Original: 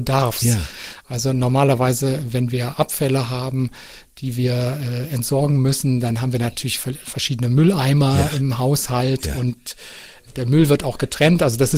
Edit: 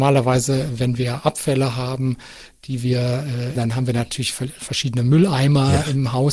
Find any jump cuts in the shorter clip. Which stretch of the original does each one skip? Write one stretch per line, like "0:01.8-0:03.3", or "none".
0:05.1-0:06.0